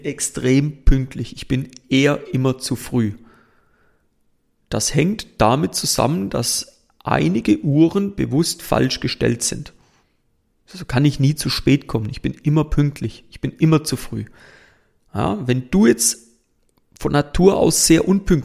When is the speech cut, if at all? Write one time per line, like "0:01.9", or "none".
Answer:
none